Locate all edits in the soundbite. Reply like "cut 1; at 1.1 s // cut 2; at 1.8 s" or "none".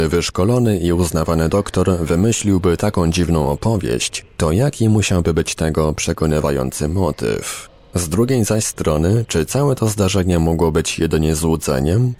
cut 1; at 4.3 s